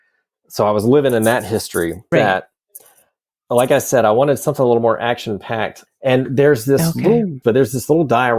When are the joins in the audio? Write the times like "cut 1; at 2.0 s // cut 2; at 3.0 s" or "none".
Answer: cut 1; at 2.1 s // cut 2; at 5.9 s // cut 3; at 7.4 s